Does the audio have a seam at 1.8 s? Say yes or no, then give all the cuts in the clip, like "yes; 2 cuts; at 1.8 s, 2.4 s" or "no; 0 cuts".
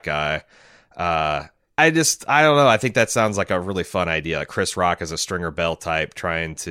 yes; 1 cut; at 1.8 s